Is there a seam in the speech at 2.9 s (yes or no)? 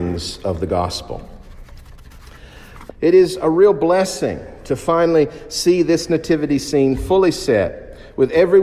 yes